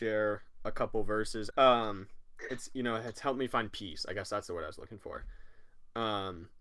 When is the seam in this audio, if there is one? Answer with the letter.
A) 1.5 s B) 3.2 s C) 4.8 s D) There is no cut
A